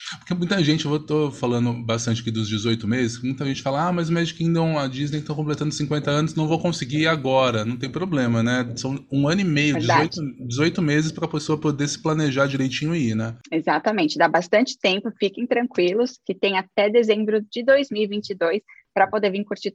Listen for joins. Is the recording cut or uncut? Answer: uncut